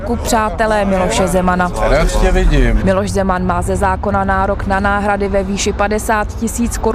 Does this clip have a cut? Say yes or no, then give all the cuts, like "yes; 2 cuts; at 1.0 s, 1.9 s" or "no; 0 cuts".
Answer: yes; 1 cut; at 2.8 s